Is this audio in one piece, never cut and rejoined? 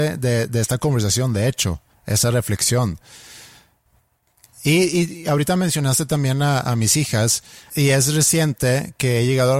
no; 1 cut; at 7.7 s

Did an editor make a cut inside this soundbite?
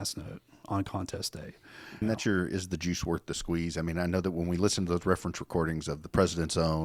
yes; 1 cut; at 2.0 s

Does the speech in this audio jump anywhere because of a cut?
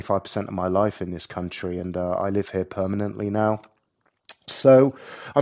no; 0 cuts

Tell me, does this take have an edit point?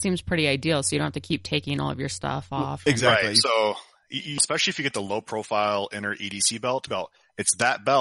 yes; 2 cuts; at 4.4 s, 6.9 s

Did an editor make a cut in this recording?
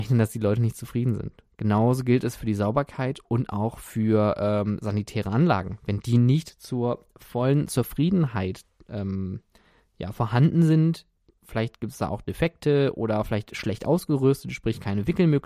no; 0 cuts

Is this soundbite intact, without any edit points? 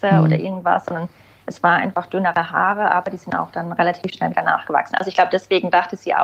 yes; 0 cuts

